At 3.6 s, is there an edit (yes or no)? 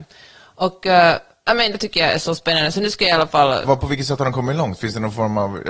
yes